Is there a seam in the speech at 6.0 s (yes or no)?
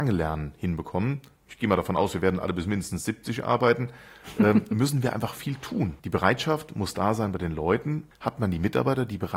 yes